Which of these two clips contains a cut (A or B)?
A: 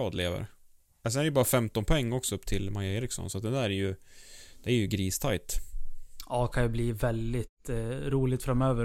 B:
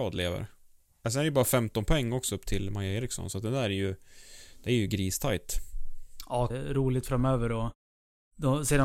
B